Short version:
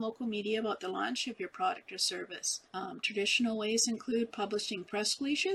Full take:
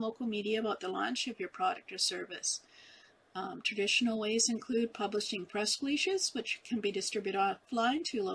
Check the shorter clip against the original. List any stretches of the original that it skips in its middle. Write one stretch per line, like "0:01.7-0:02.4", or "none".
0:02.7-0:03.3